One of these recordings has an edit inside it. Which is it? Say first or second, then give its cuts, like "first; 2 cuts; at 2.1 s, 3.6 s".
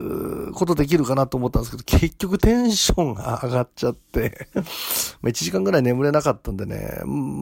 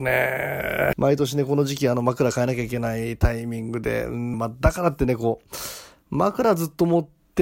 second; 2 cuts; at 0.9 s, 4.3 s